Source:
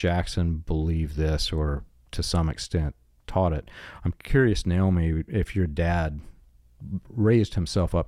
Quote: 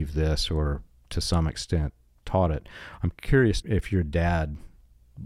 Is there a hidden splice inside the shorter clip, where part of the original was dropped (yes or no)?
yes